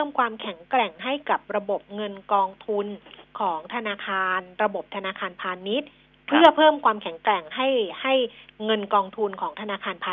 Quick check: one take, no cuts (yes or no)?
yes